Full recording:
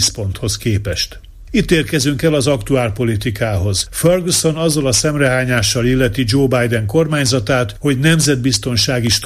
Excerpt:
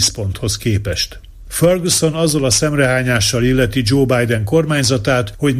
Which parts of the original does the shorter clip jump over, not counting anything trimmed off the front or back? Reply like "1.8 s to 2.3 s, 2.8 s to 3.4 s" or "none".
1.5 s to 3.9 s